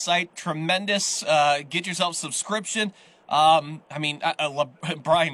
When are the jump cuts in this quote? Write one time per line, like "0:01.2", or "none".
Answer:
0:03.8